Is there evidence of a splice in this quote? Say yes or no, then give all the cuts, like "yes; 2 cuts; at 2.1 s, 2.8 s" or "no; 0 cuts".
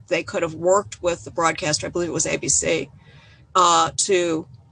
no; 0 cuts